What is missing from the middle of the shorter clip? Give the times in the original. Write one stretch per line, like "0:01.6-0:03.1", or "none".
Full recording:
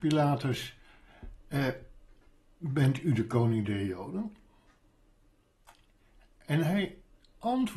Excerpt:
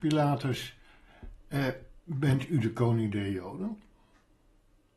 0:02.0-0:02.5